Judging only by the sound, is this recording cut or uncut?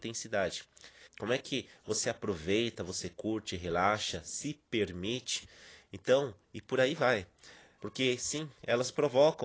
cut